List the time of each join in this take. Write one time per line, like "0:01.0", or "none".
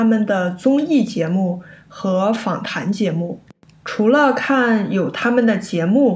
0:03.8